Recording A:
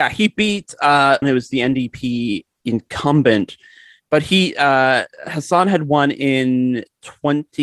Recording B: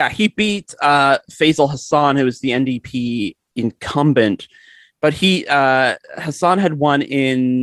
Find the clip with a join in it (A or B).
A